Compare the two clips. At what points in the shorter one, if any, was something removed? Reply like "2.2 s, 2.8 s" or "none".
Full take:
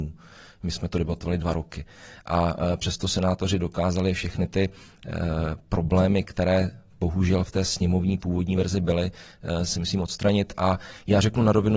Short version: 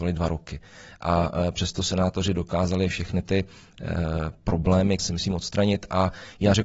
5.0 s